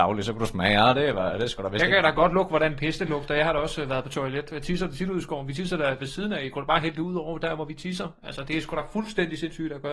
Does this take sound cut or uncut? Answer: uncut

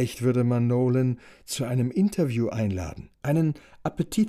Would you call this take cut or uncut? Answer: cut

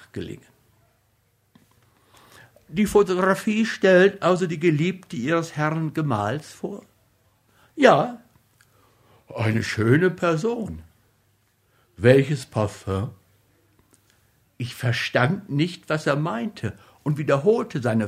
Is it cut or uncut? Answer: uncut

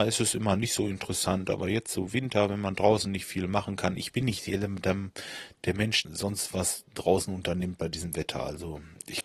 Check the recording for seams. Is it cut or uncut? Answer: cut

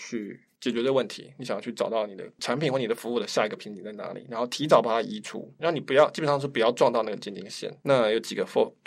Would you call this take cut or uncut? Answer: cut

